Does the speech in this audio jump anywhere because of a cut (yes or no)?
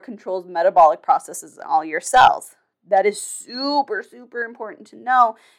no